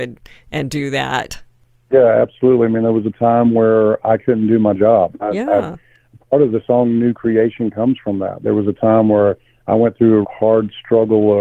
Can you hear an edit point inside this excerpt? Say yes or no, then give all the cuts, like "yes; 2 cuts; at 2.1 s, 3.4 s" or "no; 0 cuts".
yes; 2 cuts; at 5.1 s, 10.2 s